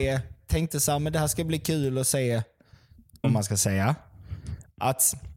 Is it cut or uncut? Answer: cut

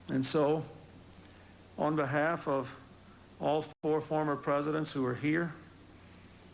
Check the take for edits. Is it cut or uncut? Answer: uncut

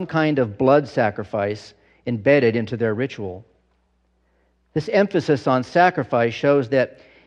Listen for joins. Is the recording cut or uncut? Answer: uncut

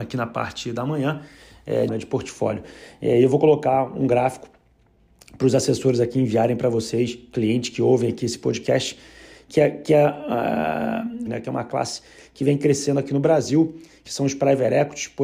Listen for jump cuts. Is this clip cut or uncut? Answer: cut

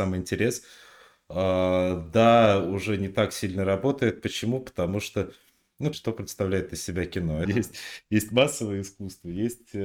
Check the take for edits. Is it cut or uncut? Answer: cut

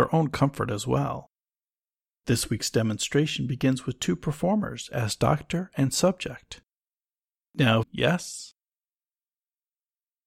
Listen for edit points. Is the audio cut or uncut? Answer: cut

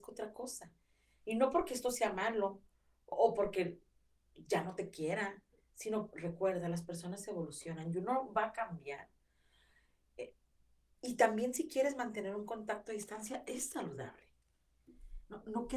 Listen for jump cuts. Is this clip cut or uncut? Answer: cut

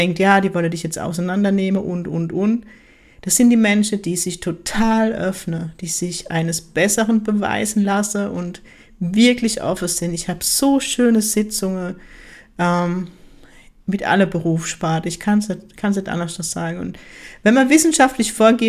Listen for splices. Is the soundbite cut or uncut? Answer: uncut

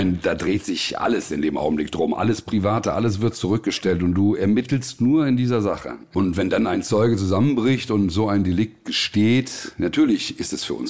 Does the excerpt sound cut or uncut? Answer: uncut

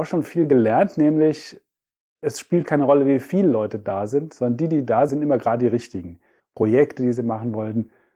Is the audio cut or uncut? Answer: cut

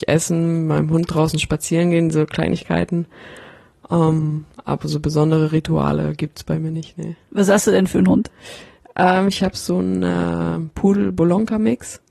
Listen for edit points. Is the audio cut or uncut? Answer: uncut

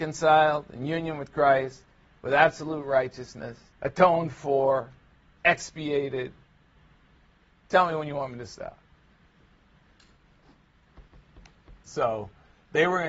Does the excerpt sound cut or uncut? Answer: cut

